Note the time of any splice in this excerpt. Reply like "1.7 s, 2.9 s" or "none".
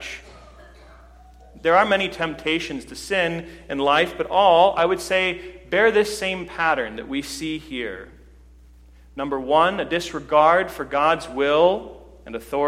none